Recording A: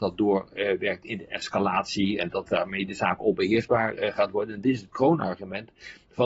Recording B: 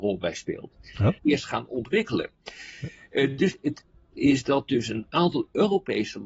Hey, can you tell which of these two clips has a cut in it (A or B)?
B